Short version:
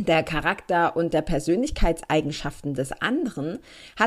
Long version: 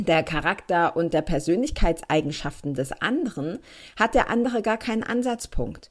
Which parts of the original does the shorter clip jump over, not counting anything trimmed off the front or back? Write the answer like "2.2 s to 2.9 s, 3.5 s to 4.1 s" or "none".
none